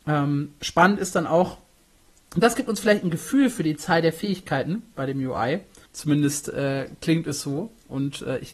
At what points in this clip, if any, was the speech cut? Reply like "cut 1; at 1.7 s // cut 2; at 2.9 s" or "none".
cut 1; at 5.9 s